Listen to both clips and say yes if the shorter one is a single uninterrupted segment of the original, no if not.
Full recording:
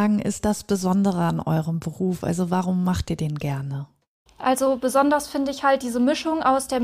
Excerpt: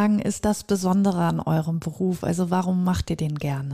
yes